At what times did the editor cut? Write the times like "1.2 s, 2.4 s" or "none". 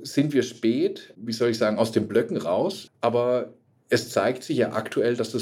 2.9 s